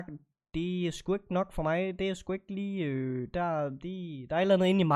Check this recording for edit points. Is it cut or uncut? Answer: uncut